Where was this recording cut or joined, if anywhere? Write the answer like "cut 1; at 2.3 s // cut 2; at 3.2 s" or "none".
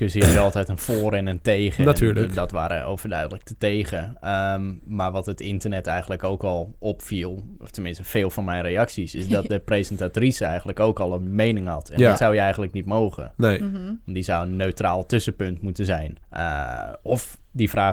cut 1; at 16.2 s